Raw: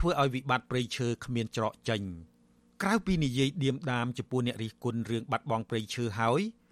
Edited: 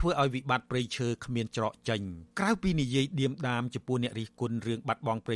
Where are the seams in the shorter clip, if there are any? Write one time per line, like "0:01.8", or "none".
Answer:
0:02.3